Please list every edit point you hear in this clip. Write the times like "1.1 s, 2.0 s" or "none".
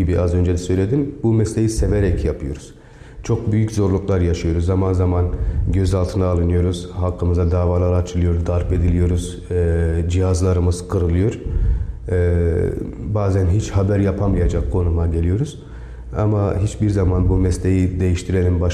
none